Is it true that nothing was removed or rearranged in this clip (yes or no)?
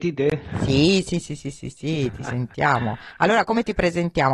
yes